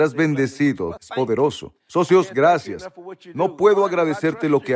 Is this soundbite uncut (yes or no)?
no